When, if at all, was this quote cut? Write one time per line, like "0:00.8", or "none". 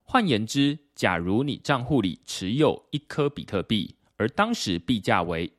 none